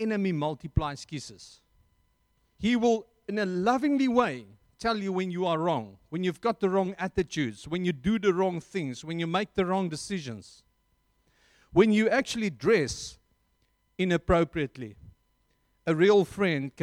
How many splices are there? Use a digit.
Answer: 1